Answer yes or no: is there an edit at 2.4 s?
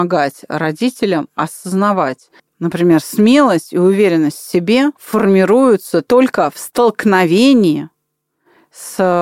yes